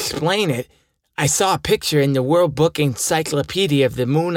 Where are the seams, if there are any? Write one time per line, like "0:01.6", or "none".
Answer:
none